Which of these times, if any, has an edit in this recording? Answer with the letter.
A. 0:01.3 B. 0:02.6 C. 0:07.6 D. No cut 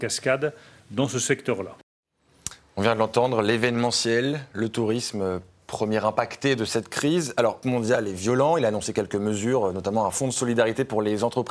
C